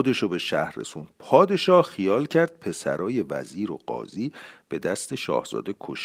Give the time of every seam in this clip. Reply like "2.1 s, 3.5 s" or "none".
none